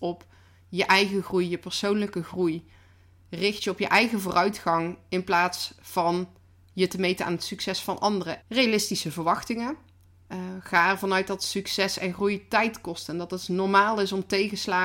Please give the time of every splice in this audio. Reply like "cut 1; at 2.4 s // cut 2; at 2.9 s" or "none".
cut 1; at 8.4 s // cut 2; at 10.2 s